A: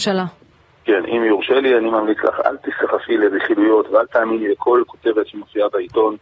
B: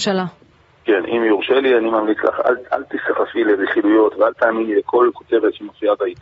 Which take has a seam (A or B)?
A